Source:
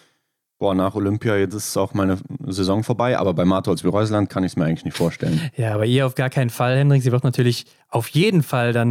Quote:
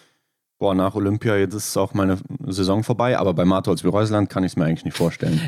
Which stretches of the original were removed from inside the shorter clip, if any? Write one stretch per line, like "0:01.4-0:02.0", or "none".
none